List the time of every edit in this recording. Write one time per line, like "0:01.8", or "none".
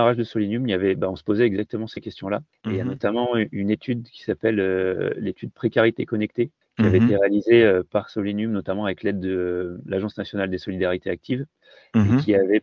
none